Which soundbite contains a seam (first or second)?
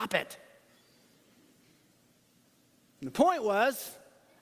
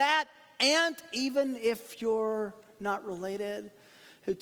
first